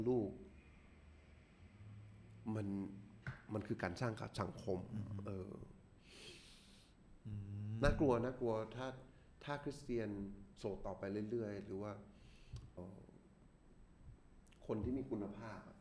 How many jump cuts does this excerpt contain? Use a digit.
1